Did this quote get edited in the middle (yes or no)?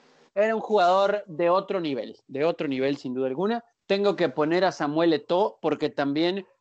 yes